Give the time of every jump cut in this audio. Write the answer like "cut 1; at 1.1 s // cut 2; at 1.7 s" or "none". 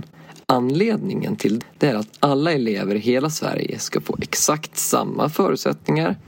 cut 1; at 1.6 s